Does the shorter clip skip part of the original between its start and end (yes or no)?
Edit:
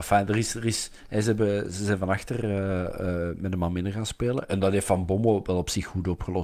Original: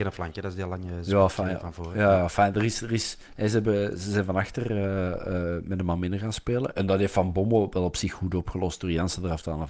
no